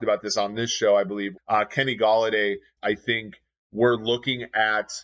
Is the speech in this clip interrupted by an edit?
yes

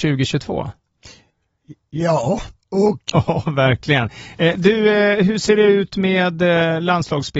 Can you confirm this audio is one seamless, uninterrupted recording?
no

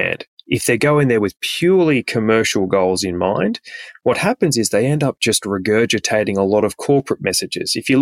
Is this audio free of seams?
yes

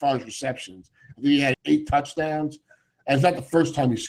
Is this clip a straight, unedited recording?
no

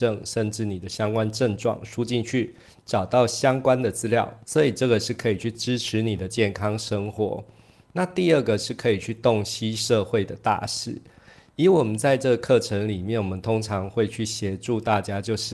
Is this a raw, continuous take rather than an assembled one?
no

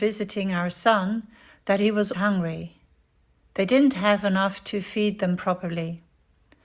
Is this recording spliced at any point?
yes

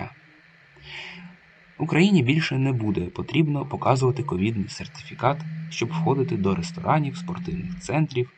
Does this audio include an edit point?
no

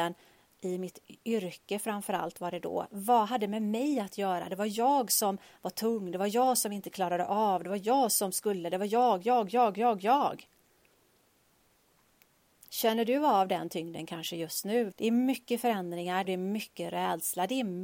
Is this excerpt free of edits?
no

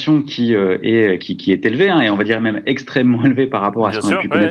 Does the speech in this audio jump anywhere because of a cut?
yes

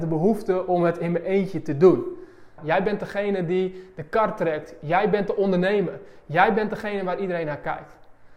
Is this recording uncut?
no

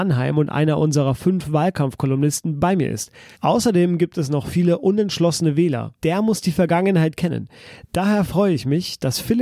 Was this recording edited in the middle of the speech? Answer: yes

